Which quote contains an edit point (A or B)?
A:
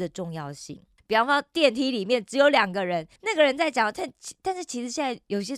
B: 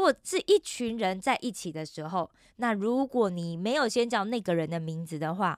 A